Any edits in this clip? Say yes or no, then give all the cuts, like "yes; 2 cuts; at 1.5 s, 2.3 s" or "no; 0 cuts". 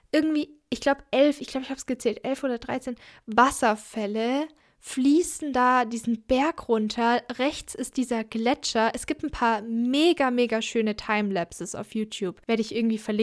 no; 0 cuts